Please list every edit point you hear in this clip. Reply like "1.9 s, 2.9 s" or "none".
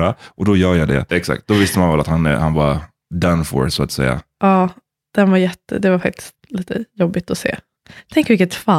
1.1 s